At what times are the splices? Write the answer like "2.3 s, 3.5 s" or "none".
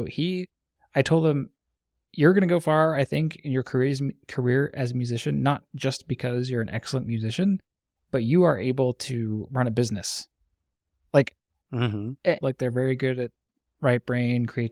12.4 s

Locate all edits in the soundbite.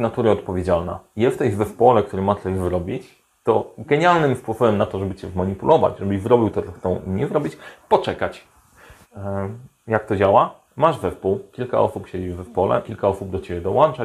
9.0 s, 10.7 s, 12.8 s

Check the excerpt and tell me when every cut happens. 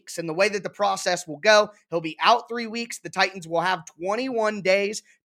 none

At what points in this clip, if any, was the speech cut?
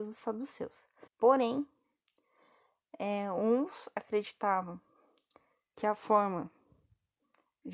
1.1 s

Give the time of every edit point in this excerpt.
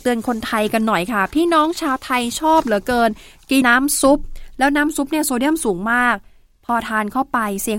3.6 s

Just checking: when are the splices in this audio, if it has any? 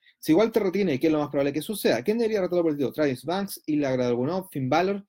none

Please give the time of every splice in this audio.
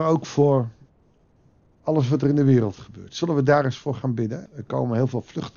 4.5 s

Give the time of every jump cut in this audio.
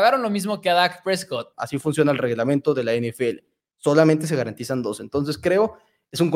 1.5 s

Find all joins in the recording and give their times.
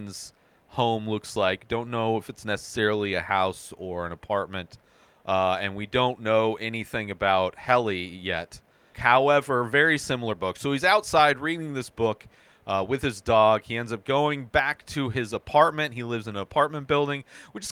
8.9 s

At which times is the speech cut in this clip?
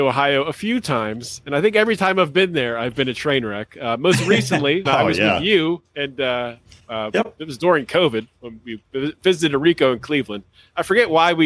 4.8 s, 6.8 s

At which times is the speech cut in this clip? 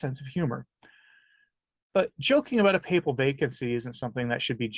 none

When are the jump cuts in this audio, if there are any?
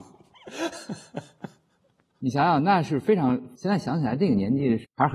none

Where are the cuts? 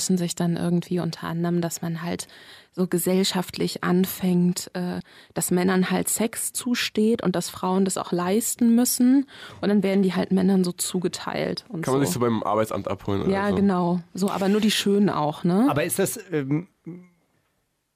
none

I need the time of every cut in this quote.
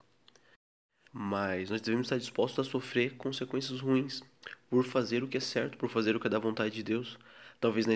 1.1 s

